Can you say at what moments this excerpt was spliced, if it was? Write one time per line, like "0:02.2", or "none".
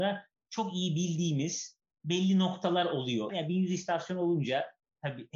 0:03.3